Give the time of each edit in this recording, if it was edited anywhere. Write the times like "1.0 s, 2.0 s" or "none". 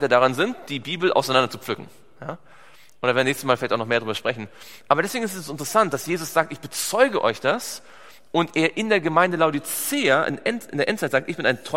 none